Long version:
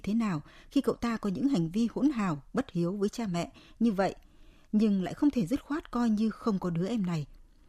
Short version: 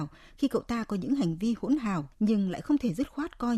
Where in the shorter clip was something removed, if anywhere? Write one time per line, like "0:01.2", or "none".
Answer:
0:02.1

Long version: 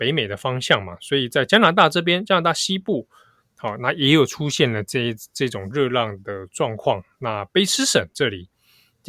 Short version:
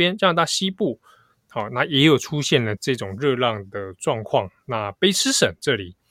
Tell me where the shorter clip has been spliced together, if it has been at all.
0:02.8

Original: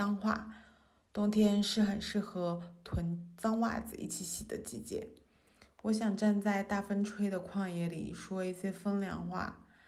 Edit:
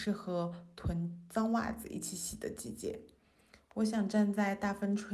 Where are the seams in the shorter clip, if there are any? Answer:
none

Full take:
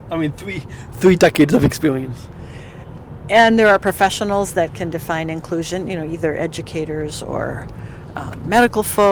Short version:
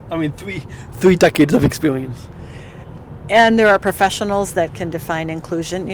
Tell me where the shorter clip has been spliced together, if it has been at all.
none

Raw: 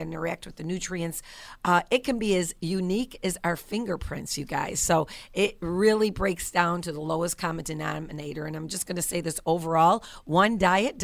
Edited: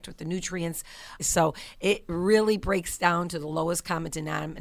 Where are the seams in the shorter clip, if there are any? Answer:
0:01.2

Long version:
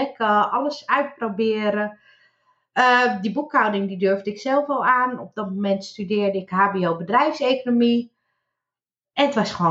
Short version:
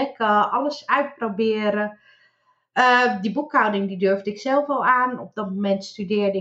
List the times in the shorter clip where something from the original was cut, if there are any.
none

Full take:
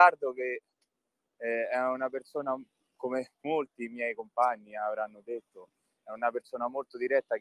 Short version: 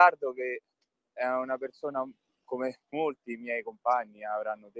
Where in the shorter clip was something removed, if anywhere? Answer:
0:01.2

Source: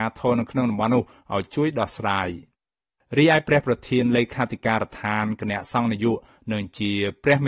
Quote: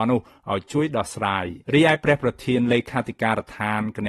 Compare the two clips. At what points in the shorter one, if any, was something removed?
0:01.6

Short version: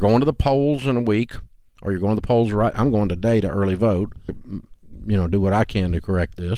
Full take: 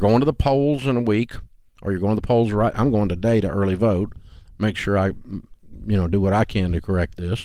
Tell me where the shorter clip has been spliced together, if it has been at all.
0:04.3

